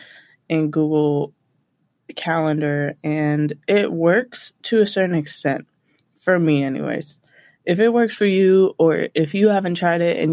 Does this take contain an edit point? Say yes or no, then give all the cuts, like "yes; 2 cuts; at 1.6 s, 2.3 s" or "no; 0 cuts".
no; 0 cuts